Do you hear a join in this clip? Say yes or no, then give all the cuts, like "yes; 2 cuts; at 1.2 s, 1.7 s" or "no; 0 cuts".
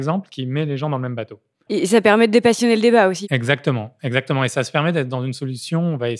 yes; 1 cut; at 1.7 s